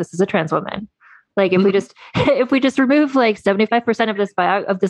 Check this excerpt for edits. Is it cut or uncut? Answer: uncut